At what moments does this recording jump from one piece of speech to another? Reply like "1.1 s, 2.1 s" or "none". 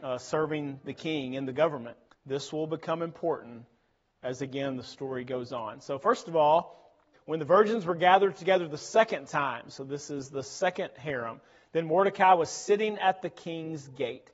2.1 s, 7.1 s